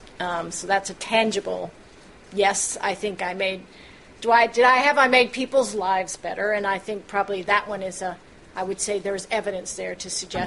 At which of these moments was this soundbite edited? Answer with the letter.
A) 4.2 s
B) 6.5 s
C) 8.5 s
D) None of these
A